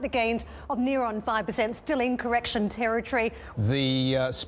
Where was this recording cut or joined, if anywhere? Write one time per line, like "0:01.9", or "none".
0:03.5